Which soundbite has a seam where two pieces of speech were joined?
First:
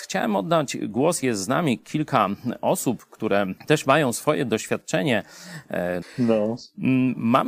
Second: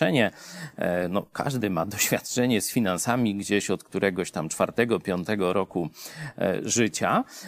first; 2 cuts; at 3.6 s, 6.0 s

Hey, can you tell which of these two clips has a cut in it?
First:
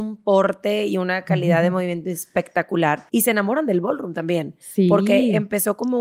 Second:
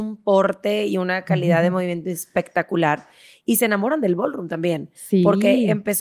first; 1 cut; at 3.1 s

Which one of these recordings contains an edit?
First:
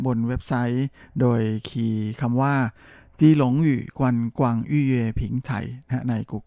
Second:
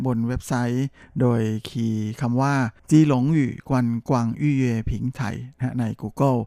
second; 1 cut; at 2.8 s

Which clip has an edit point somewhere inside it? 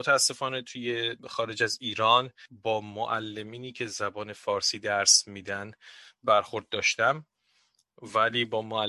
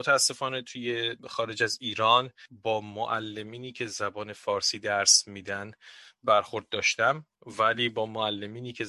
second; 1 cut; at 7.3 s

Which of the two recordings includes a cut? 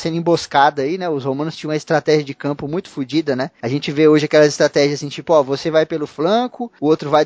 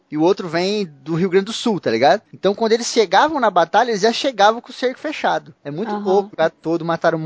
second; 2 cuts; at 2.3 s, 6.3 s

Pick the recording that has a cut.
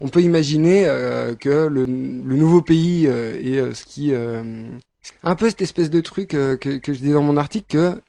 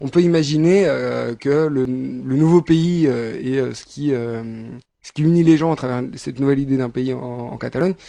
first; 1 cut; at 5.1 s

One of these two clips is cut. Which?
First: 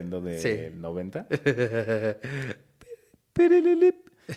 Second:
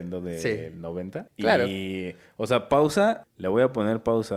second; 2 cuts; at 1.3 s, 3.2 s

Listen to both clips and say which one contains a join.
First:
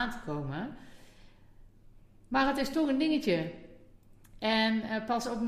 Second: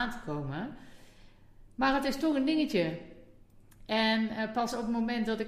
second; 1 cut; at 1.7 s

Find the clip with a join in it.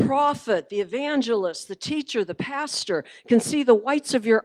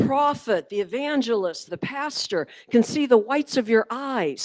second; 1 cut; at 1.7 s

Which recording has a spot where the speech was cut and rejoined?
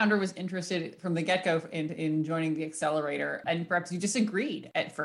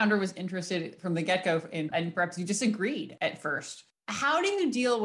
second; 1 cut; at 1.9 s

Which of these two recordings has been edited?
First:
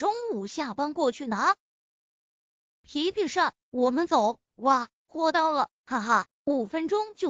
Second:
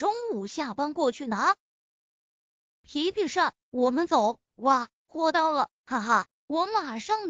first; 1 cut; at 6.4 s

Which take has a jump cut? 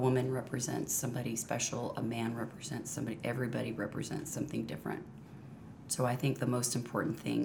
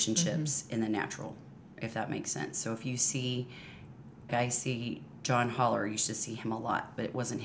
second; 1 cut; at 4.3 s

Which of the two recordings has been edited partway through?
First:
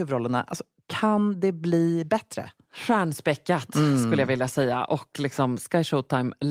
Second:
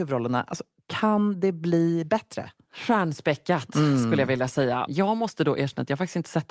second; 1 cut; at 4.9 s

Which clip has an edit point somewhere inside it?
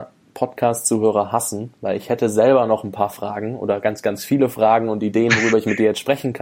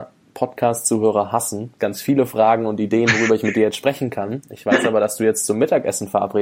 second; 1 cut; at 1.8 s

